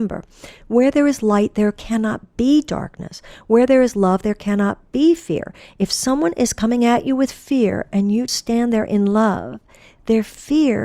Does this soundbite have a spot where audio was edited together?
yes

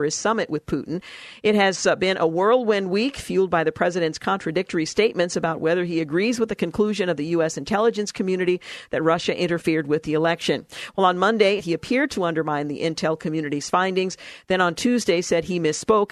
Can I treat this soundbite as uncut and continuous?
no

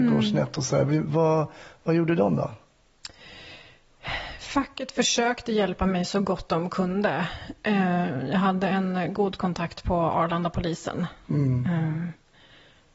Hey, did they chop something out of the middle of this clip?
no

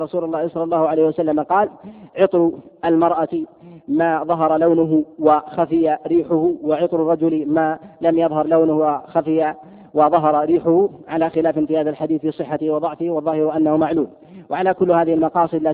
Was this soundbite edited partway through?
yes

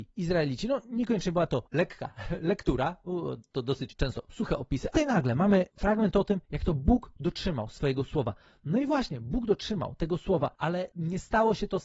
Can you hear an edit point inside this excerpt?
yes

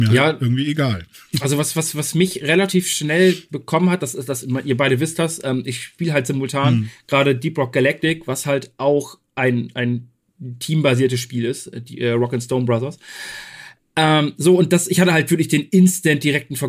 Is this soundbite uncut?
yes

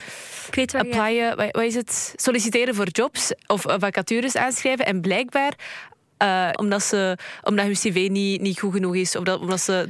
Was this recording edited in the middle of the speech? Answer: yes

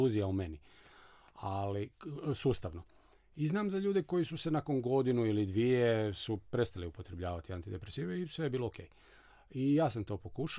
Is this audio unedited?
yes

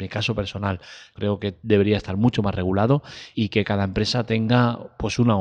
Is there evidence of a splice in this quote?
yes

